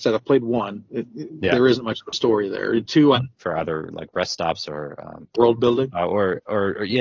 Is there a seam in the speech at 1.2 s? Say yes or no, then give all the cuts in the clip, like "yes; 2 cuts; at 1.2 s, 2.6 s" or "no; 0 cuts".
no; 1 cut; at 3.1 s